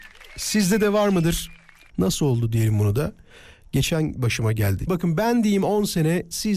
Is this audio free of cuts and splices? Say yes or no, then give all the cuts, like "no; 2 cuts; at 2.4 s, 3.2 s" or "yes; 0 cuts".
no; 2 cuts; at 1.9 s, 4.9 s